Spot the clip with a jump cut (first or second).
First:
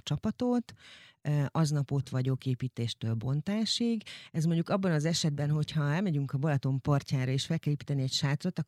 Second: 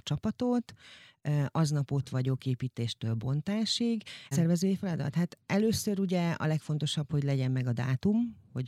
second